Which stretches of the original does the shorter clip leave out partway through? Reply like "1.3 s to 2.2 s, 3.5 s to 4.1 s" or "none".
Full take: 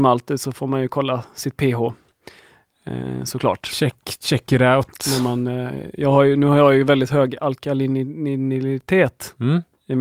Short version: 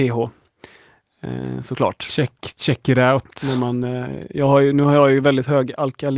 none